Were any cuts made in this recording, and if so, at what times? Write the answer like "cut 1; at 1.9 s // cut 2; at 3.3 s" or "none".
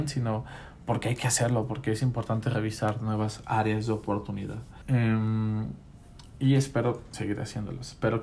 cut 1; at 4.8 s